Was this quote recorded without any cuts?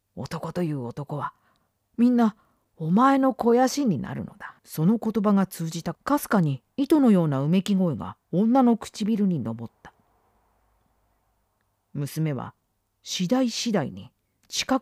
no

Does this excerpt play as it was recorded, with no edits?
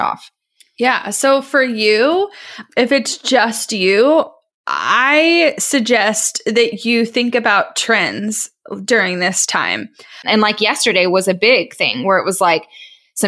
no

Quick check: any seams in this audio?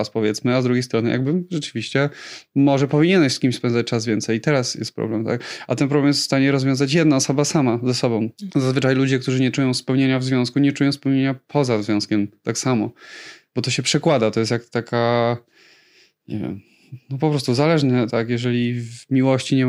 yes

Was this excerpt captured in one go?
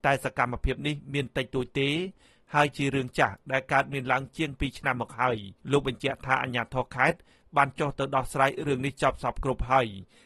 no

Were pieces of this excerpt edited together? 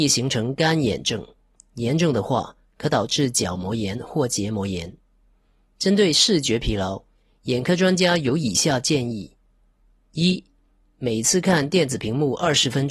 no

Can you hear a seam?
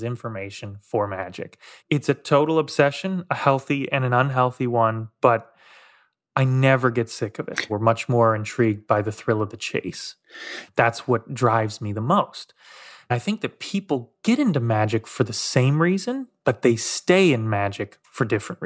yes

